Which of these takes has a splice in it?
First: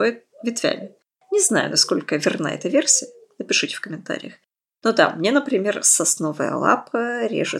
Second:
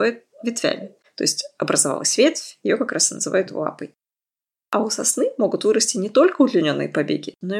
second; 1 cut; at 1.0 s

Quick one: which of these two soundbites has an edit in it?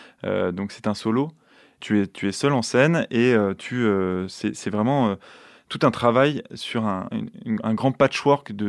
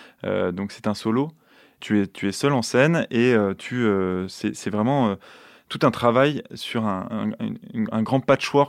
first; 1 cut; at 7.1 s

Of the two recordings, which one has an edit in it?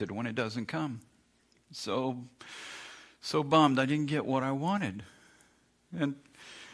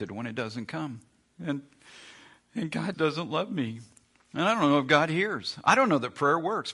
second; 2 cuts; at 1.3 s, 2.9 s

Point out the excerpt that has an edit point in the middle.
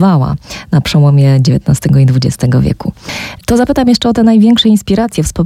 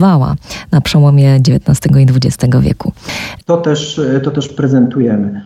second; 1 cut; at 3.4 s

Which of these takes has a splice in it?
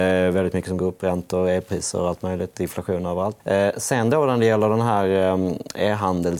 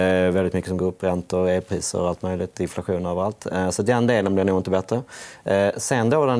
first; 1 cut; at 3.4 s

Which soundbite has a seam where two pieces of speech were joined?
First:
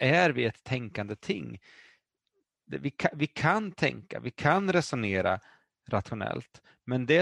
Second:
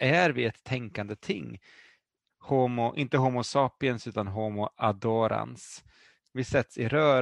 second; 2 cuts; at 2.3 s, 6.2 s

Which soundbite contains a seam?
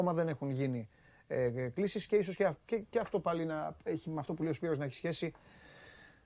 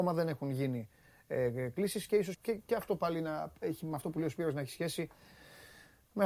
second; 1 cut; at 2.3 s

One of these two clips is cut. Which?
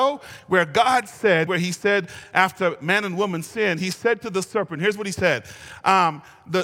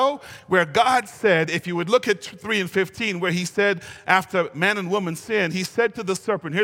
first; 1 cut; at 1.5 s

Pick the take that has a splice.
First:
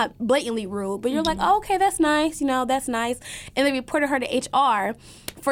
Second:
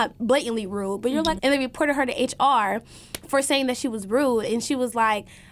second; 1 cut; at 1.4 s

